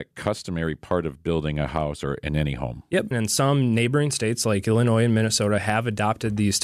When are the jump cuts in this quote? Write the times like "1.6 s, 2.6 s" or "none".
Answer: 3.1 s